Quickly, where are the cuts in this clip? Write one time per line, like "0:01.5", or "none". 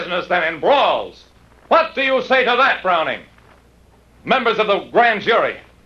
0:04.1